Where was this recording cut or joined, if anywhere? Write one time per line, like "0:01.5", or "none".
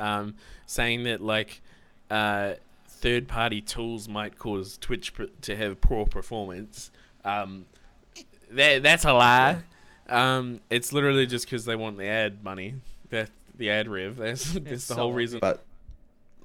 0:13.1
0:15.4